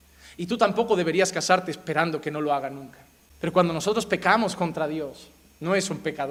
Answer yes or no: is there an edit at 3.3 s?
no